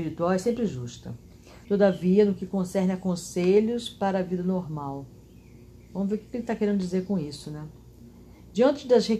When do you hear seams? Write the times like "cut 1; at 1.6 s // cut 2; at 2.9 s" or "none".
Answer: cut 1; at 1.6 s